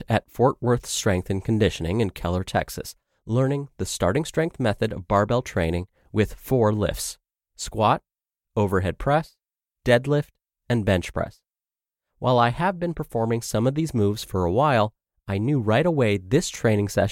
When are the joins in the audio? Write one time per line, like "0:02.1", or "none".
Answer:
none